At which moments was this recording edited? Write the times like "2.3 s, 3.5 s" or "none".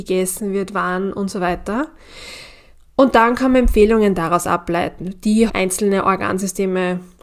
5.5 s